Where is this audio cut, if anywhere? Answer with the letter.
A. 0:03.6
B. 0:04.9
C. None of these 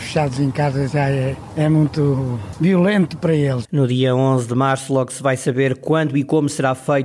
A